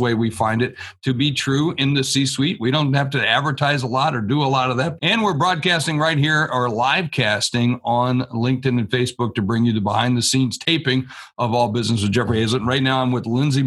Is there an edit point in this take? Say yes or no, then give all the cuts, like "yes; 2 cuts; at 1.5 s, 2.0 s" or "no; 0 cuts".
yes; 1 cut; at 5.0 s